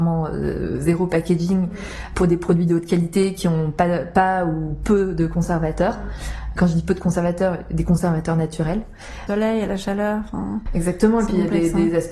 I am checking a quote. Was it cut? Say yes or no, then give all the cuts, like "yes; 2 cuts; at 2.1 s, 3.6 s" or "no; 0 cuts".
yes; 1 cut; at 9.3 s